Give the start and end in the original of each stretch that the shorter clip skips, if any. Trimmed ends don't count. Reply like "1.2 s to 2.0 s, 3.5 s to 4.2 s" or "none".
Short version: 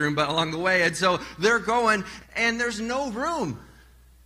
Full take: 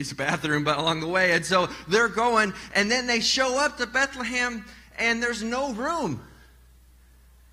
2.7 s to 4.8 s